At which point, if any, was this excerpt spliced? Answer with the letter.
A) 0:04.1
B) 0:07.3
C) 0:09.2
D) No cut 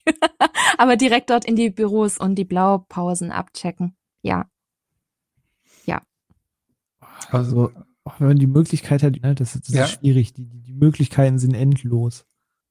C